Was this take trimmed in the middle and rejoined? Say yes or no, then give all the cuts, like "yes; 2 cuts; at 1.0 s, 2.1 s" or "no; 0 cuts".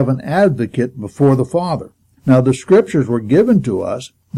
yes; 1 cut; at 2.2 s